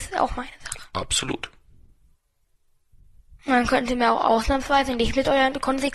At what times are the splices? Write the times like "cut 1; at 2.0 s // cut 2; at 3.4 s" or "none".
cut 1; at 3.4 s